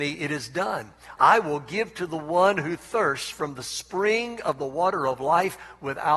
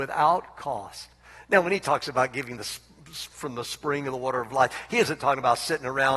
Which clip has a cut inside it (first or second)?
first